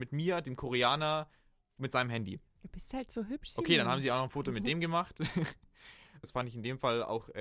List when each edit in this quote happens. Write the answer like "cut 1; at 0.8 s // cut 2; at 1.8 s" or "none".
cut 1; at 6.2 s